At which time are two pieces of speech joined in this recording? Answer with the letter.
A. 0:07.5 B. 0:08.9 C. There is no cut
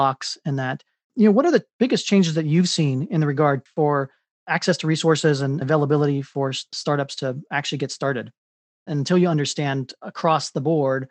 B